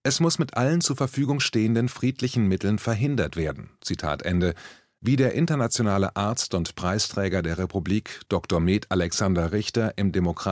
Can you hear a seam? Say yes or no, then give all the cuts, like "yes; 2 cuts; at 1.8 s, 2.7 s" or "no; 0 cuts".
no; 0 cuts